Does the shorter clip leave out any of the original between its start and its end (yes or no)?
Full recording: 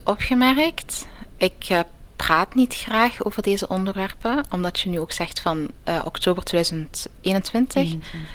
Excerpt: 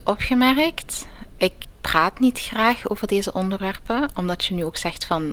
yes